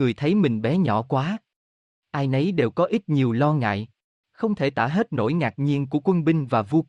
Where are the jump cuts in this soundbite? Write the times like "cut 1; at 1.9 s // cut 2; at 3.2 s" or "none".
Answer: cut 1; at 4.1 s